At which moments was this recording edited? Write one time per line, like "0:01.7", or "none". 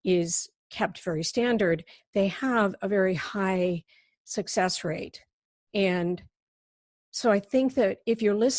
none